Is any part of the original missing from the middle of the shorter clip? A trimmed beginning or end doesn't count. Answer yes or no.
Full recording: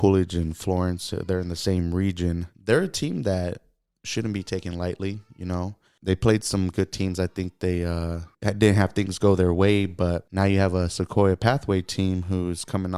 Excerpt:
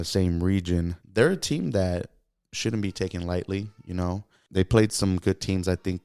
no